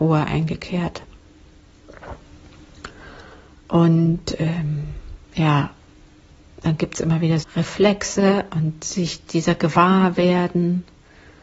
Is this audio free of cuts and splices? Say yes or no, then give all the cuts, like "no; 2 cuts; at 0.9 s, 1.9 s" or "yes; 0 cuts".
no; 2 cuts; at 5.2 s, 7.4 s